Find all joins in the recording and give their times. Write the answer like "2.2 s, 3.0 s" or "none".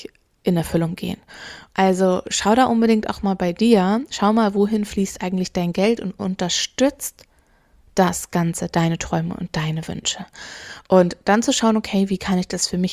1.7 s